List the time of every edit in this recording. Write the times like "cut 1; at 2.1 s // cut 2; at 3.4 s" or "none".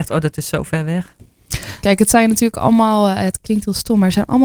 cut 1; at 1.8 s